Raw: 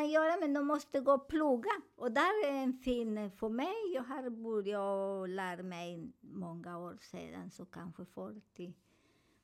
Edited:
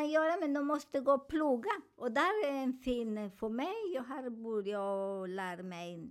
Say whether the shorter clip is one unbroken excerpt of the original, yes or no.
yes